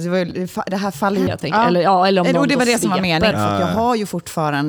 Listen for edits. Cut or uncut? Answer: cut